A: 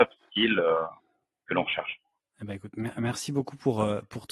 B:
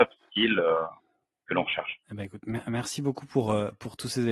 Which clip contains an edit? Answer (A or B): B